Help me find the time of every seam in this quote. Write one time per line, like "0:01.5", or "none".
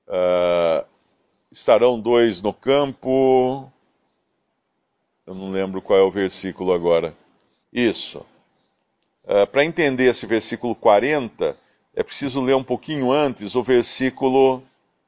0:07.6